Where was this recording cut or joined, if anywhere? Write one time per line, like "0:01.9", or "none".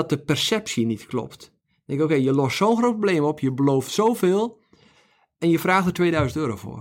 none